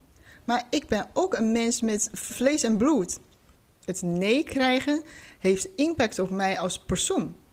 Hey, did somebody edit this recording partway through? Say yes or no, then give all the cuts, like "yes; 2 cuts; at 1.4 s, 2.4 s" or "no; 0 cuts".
yes; 1 cut; at 2.3 s